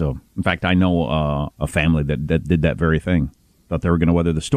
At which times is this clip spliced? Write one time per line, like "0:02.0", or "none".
0:01.5